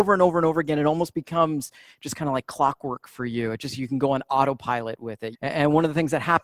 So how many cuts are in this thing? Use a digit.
1